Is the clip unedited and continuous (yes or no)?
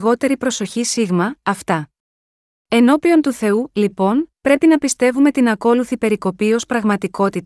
no